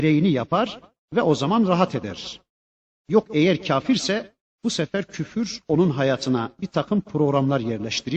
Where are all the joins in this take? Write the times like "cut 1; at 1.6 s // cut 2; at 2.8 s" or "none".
cut 1; at 2.9 s